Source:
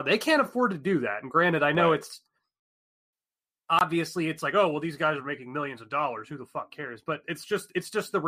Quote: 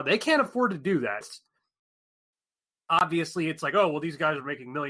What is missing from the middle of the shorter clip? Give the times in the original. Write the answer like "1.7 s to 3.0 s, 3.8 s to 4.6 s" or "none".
1.2 s to 2.0 s